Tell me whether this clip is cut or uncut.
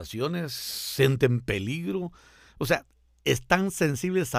uncut